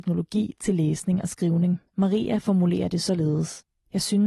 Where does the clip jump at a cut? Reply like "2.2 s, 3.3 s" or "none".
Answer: 1.9 s